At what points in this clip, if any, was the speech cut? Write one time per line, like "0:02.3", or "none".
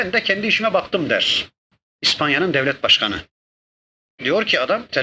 0:04.1